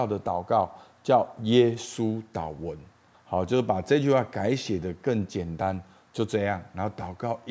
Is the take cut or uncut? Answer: cut